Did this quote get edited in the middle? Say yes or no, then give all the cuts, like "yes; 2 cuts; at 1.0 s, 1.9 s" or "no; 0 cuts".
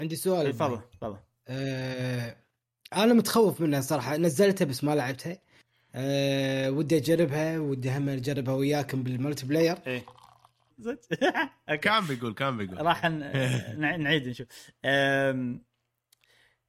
yes; 1 cut; at 10.7 s